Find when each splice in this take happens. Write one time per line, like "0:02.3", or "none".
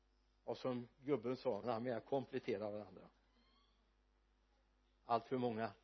0:01.6